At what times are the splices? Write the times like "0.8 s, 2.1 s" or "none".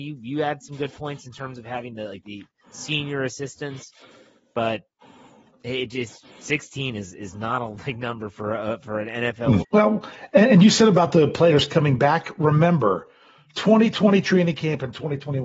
2.2 s, 9.6 s

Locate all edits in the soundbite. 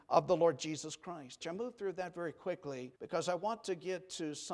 1.4 s, 2.9 s

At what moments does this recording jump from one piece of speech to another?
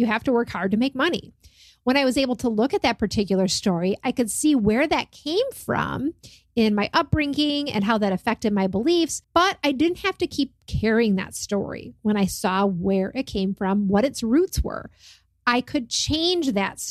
9.2 s

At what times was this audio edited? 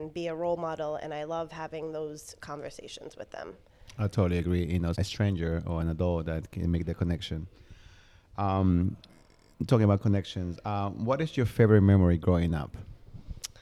4.9 s

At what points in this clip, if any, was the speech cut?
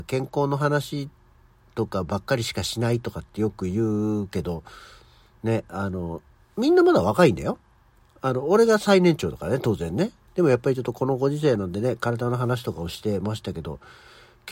10.3 s

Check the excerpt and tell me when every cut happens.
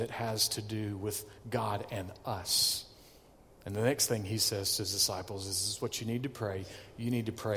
none

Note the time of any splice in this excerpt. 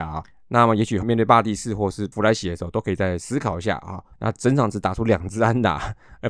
1.0 s, 4.1 s

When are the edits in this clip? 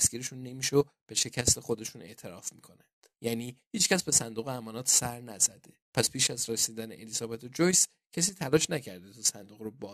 3.1 s, 5.8 s

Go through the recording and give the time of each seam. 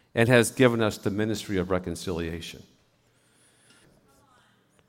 3.8 s

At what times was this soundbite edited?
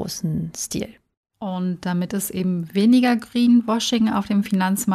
none

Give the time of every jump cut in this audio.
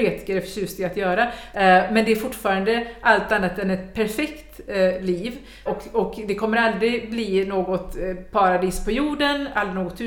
1.5 s, 5.7 s

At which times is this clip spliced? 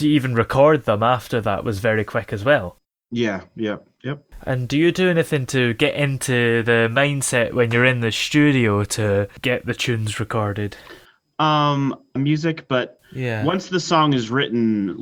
12.2 s

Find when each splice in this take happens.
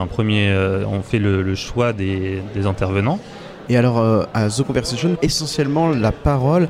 3.7 s, 5.1 s

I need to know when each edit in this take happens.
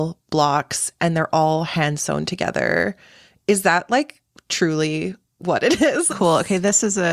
6.1 s

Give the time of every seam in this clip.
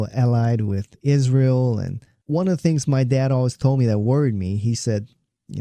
none

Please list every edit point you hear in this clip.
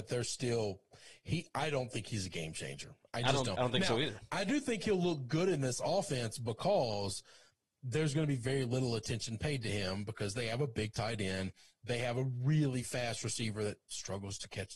none

